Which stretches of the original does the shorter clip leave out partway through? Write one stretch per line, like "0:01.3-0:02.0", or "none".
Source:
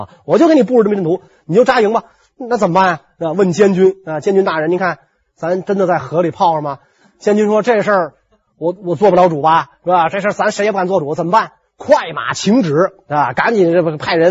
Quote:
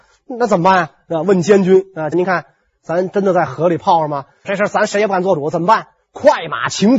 0:04.2-0:04.7
0:07.0-0:10.1